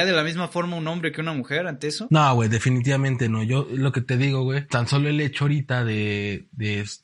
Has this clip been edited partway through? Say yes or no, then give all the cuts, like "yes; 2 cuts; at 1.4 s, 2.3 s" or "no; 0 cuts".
no; 0 cuts